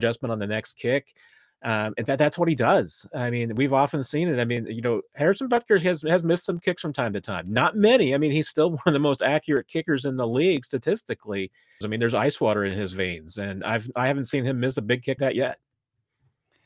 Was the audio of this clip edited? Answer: yes; 2 cuts; at 11.8 s, 15.2 s

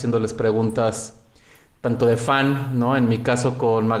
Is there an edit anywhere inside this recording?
no; 0 cuts

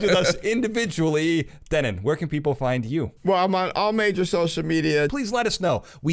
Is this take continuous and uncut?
no; 2 cuts; at 3.2 s, 5.1 s

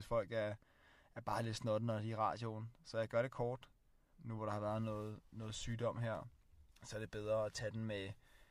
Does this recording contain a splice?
yes; 2 cuts; at 4.1 s, 6.7 s

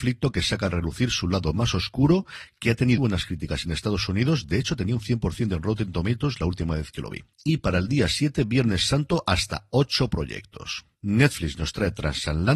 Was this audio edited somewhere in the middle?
yes; 2 cuts; at 3.0 s, 7.3 s

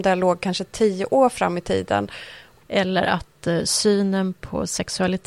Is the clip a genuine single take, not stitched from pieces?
no; 1 cut; at 2.6 s

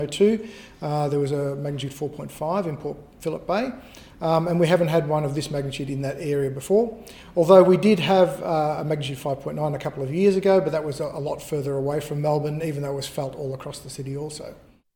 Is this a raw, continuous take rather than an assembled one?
yes; 0 cuts

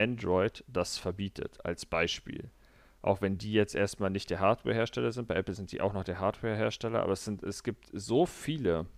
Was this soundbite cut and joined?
no; 0 cuts

